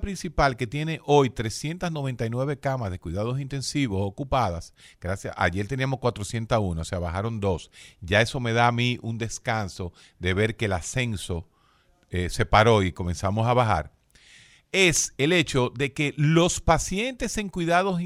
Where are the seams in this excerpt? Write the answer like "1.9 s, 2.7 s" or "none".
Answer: none

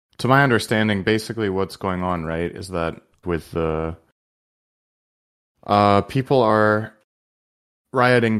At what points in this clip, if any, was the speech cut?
3.2 s

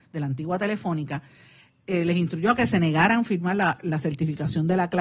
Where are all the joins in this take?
none

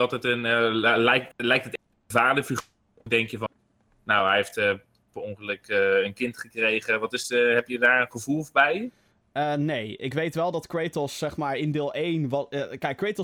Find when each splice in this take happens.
none

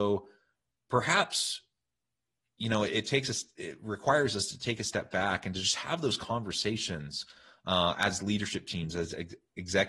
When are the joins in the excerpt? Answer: none

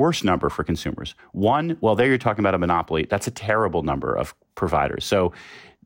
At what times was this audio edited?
none

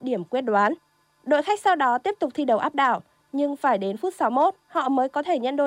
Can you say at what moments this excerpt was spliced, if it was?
none

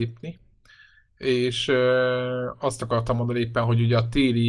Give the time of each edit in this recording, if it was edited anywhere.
none

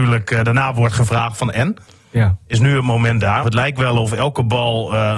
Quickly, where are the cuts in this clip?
3.4 s

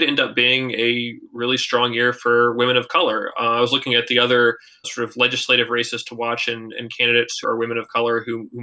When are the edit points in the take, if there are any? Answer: 4.8 s, 7.4 s

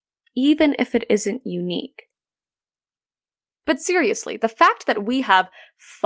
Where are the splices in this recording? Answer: 3.5 s

